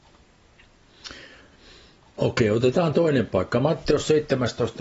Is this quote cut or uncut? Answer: uncut